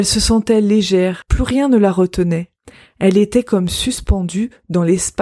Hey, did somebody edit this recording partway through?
yes; 1 cut; at 1.2 s

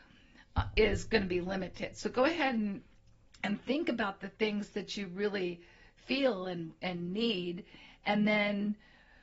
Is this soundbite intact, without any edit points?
yes; 0 cuts

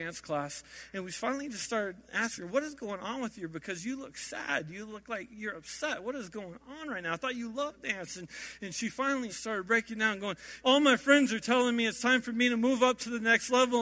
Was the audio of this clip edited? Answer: yes; 2 cuts; at 9.3 s, 10.6 s

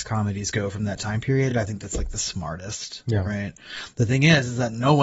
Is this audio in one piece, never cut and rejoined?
yes; 0 cuts

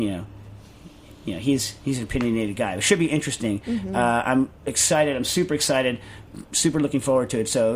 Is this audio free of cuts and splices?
yes; 0 cuts

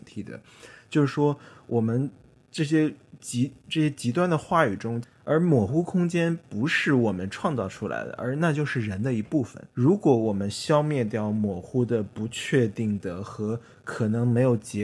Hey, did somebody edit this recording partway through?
yes; 2 cuts; at 5.0 s, 9.7 s

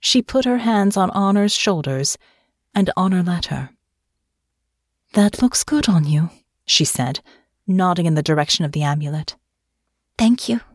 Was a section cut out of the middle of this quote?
no; 0 cuts

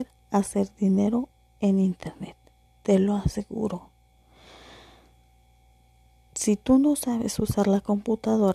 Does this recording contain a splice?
no; 0 cuts

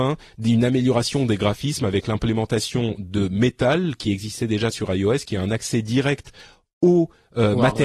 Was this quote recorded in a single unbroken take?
yes; 0 cuts

